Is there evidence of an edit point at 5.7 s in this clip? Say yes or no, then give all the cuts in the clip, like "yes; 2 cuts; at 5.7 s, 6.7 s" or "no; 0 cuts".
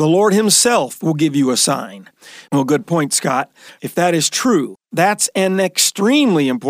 no; 2 cuts; at 2.5 s, 3.8 s